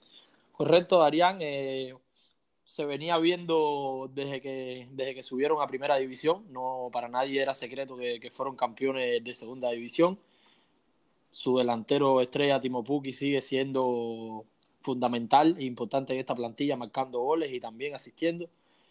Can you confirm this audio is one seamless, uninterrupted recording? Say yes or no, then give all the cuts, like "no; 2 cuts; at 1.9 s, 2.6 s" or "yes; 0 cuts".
yes; 0 cuts